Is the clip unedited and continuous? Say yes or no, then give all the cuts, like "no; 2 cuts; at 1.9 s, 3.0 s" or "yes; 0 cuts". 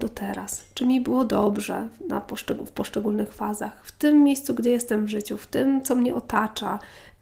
yes; 0 cuts